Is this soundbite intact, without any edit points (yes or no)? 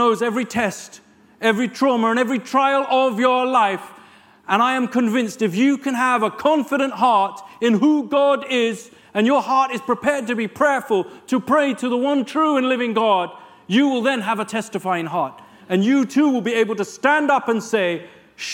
yes